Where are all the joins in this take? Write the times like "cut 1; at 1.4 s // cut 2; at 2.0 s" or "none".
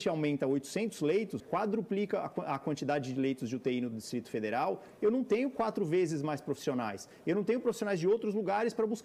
cut 1; at 1.4 s